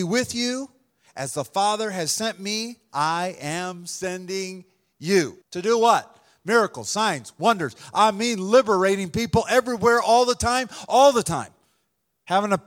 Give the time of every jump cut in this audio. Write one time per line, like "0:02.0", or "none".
0:05.4